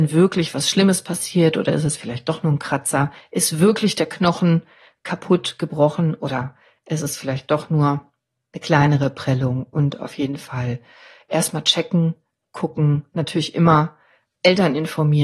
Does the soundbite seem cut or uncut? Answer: uncut